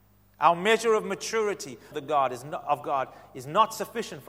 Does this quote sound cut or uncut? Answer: cut